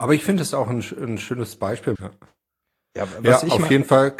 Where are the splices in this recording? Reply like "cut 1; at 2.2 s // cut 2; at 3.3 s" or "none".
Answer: cut 1; at 1.9 s